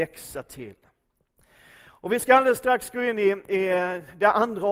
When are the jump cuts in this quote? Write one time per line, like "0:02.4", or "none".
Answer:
none